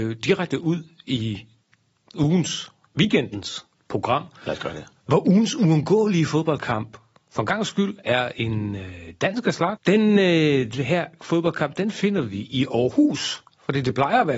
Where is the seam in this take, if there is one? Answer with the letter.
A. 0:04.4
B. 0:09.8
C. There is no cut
B